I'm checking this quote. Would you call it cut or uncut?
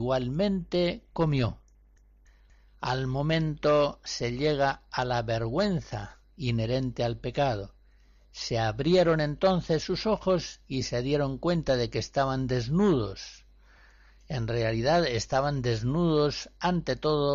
uncut